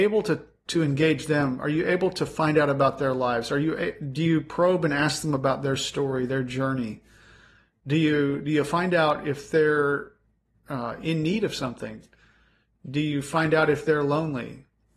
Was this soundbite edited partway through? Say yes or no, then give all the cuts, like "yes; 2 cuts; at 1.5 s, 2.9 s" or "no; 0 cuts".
no; 0 cuts